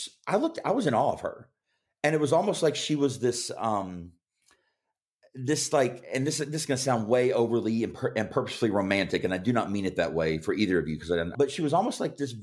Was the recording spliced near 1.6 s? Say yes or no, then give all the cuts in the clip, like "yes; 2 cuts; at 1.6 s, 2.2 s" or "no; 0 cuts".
no; 1 cut; at 11.3 s